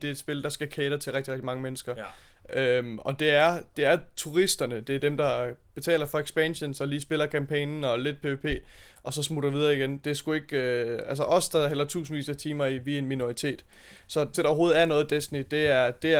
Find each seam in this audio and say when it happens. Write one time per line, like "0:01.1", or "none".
0:10.0
0:14.3